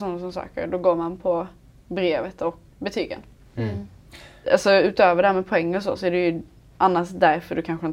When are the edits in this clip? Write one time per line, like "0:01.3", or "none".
0:02.7
0:04.4